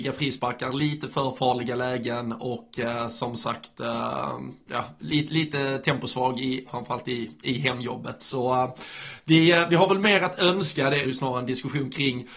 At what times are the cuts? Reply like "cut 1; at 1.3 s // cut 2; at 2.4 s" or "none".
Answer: cut 1; at 6.7 s // cut 2; at 11.0 s